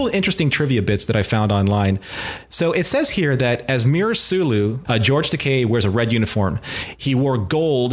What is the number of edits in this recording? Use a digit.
1